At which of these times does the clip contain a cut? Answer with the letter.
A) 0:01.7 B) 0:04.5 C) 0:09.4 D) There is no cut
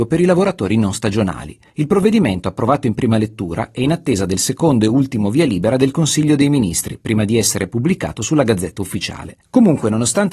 C